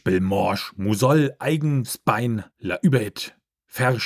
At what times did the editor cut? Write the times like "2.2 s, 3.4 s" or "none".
2.5 s

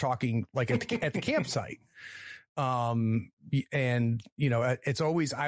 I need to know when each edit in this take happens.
none

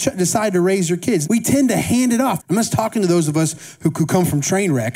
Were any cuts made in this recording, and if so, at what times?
1.2 s, 2.4 s

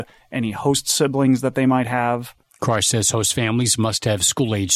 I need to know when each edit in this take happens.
2.5 s

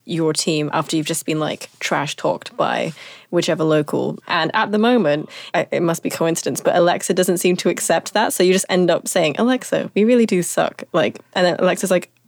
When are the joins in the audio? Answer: 4.2 s, 5.5 s

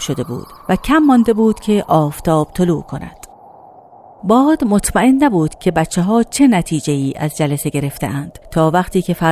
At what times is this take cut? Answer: 8.4 s

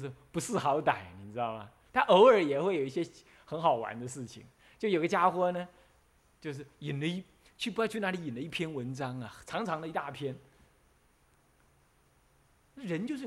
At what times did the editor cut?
1.9 s

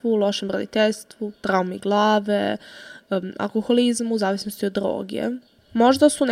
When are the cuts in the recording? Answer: none

